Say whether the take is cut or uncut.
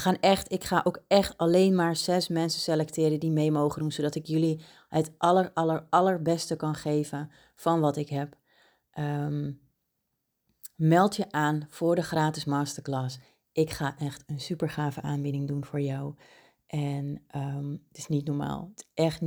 uncut